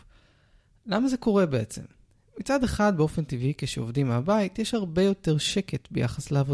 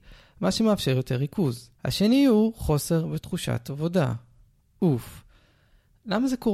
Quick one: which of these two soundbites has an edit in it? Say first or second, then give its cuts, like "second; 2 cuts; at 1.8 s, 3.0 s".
second; 1 cut; at 1.7 s